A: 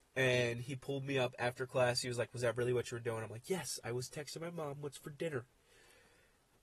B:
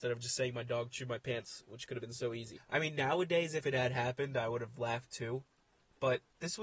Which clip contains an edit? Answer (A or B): B